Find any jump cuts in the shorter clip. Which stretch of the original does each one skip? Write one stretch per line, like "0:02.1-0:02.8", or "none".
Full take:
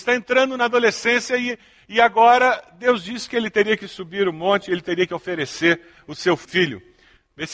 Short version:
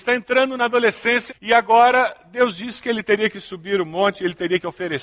0:01.3-0:01.8